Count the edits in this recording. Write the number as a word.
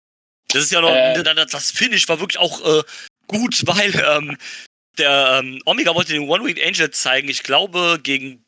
two